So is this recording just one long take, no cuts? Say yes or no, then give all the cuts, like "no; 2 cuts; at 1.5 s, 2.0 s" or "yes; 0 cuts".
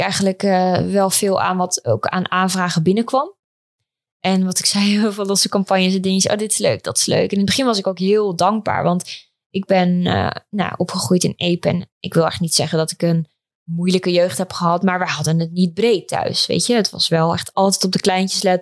yes; 0 cuts